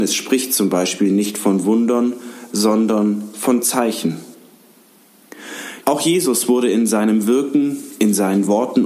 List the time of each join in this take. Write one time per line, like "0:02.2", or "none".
0:05.8